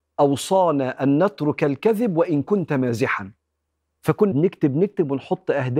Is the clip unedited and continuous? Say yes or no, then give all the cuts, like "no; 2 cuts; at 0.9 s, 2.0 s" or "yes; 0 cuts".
no; 1 cut; at 4.3 s